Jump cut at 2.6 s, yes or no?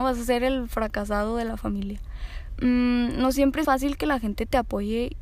yes